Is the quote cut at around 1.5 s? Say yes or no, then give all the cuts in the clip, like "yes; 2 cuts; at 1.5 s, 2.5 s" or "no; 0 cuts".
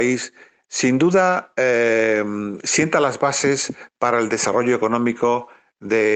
no; 0 cuts